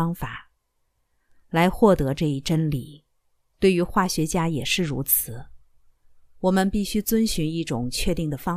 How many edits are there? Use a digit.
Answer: 1